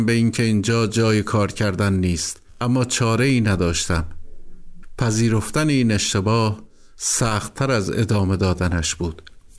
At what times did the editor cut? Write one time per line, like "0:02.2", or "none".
0:02.5